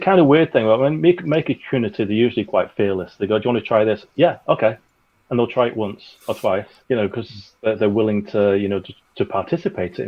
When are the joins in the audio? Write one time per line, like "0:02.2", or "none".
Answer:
0:06.8